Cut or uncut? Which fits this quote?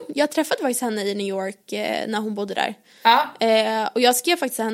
uncut